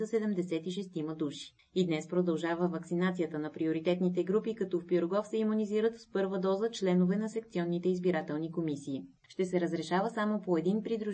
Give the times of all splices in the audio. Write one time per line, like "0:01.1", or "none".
0:09.2